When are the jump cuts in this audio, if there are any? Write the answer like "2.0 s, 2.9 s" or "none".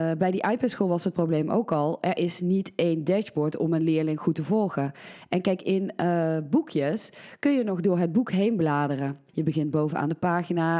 9.3 s